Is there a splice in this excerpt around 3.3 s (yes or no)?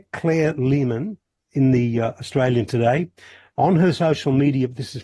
no